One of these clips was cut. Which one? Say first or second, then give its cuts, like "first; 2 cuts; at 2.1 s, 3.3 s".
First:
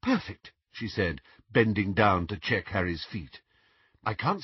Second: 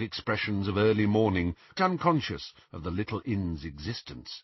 second; 1 cut; at 1.7 s